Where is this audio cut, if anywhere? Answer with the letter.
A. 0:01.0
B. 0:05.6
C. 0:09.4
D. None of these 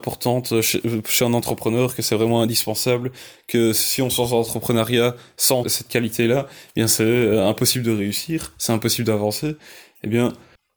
B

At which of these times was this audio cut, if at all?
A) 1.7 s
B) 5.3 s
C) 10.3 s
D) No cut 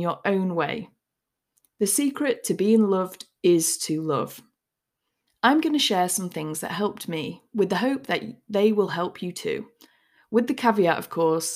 B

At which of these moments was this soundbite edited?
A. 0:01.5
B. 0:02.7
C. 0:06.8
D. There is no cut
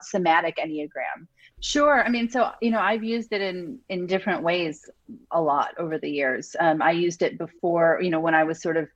A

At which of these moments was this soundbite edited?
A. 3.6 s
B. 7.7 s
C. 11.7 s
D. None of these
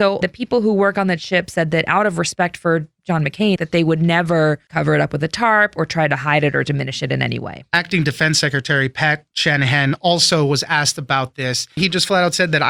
A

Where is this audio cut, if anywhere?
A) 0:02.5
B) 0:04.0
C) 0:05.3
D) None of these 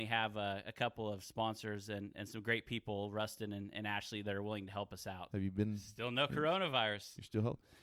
C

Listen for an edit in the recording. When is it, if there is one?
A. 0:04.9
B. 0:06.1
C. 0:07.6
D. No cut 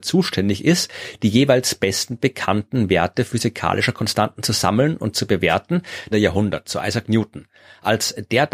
B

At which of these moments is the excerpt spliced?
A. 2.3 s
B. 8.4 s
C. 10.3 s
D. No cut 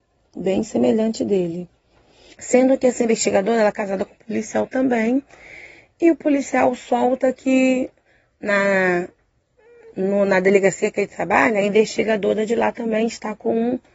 A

